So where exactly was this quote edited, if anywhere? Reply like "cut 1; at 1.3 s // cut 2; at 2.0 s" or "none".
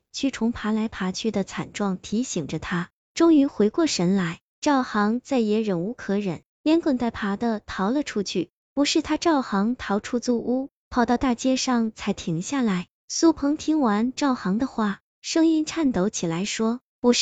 cut 1; at 3.0 s // cut 2; at 10.0 s // cut 3; at 13.0 s